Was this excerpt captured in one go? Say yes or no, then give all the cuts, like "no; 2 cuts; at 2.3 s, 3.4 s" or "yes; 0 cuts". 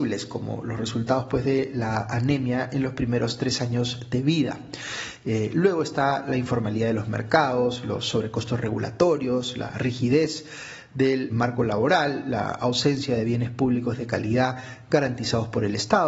no; 1 cut; at 11.3 s